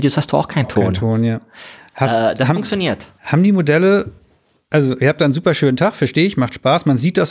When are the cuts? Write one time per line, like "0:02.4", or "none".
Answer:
none